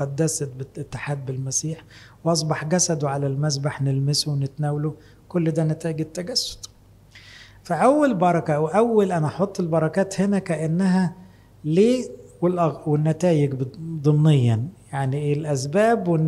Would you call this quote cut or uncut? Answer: uncut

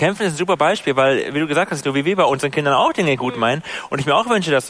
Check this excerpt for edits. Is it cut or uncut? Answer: cut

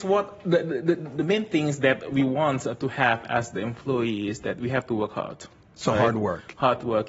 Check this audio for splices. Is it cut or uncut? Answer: uncut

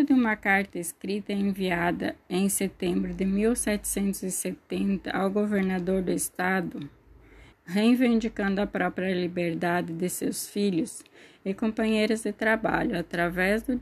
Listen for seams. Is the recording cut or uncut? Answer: cut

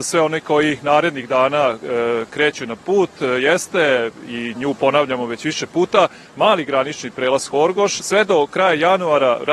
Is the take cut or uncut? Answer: cut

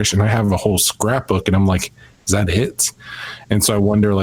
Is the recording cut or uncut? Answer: uncut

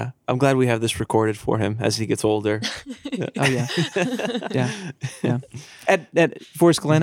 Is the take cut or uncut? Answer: uncut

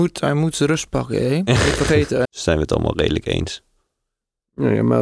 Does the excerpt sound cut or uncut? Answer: cut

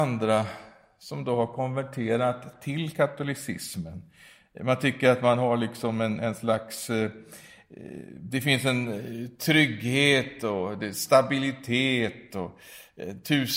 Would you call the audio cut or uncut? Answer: uncut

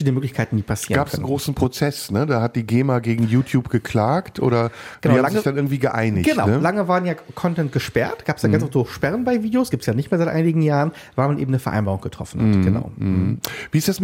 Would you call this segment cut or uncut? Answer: uncut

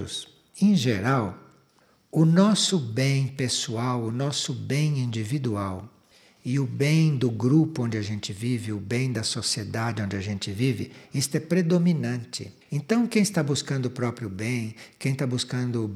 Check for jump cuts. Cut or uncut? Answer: cut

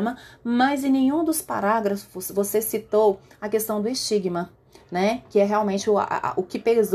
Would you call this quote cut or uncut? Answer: uncut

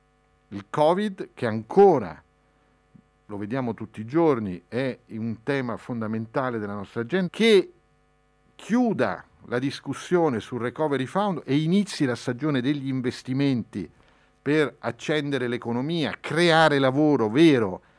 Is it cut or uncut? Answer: cut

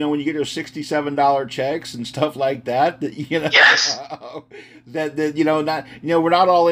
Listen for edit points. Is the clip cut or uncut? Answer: uncut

